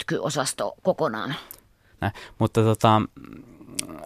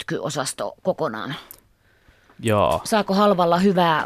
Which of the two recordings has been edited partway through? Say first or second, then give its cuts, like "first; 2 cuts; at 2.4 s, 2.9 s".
first; 1 cut; at 1.9 s